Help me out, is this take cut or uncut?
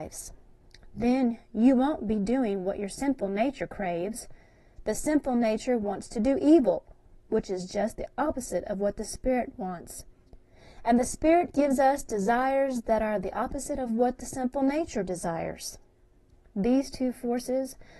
uncut